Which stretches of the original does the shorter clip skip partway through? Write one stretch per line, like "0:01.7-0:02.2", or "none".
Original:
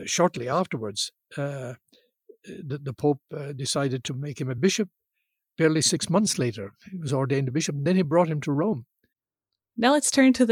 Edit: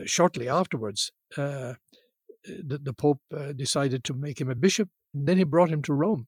0:05.1-0:07.7